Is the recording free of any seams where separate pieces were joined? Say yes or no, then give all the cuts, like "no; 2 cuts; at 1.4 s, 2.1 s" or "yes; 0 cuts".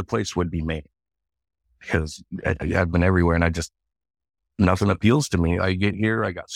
yes; 0 cuts